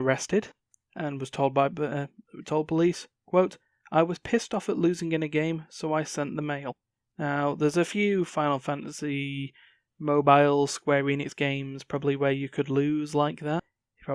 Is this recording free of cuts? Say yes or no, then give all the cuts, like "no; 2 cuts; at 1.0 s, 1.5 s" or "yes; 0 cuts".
yes; 0 cuts